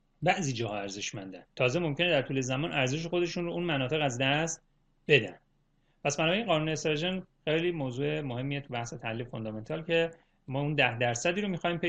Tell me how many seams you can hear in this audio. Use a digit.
1